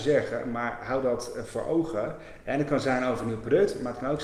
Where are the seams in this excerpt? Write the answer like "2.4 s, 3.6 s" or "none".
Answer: 2.4 s